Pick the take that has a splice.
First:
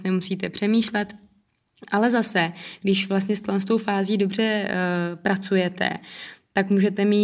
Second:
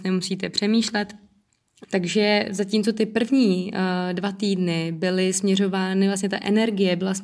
second; 1 cut; at 1.8 s

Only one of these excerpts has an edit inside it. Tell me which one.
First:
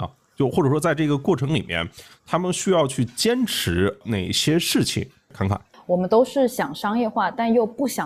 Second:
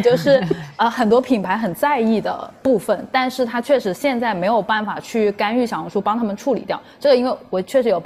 first; 1 cut; at 5.7 s

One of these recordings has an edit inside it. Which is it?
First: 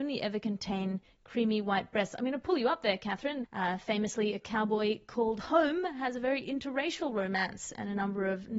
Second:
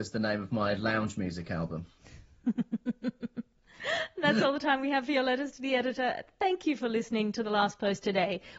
first; 1 cut; at 3.4 s

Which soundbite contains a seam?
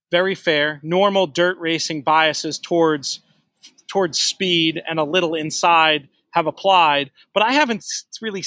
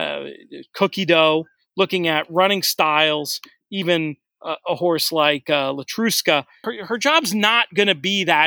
second; 1 cut; at 6.6 s

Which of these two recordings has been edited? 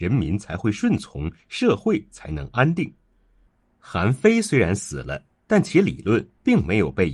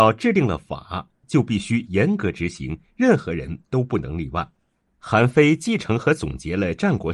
second; 1 cut; at 4.8 s

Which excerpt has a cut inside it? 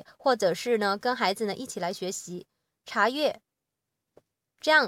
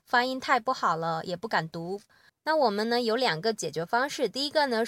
second; 1 cut; at 2.3 s

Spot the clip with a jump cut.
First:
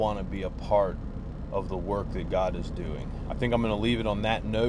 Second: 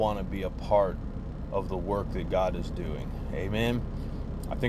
first; 1 cut; at 3.3 s

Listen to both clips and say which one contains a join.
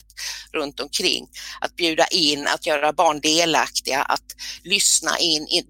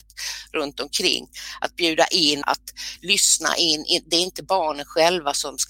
second; 1 cut; at 2.4 s

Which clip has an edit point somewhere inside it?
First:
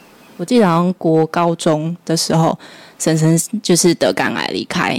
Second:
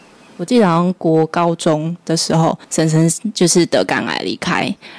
second; 1 cut; at 2.6 s

